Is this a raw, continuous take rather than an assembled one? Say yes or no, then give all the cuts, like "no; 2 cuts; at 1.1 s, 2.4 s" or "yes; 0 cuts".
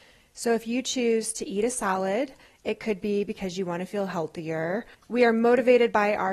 no; 1 cut; at 5.0 s